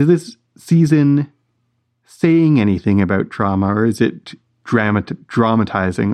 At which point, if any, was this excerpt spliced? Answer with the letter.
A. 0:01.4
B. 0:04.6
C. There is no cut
B